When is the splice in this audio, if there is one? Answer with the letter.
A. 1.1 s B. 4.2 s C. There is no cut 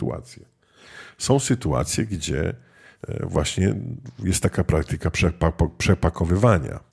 C